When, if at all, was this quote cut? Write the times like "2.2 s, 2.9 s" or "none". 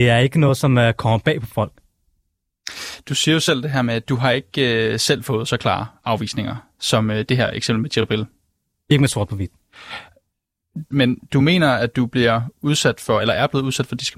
10.9 s